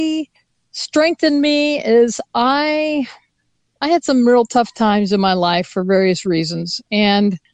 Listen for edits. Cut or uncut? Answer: uncut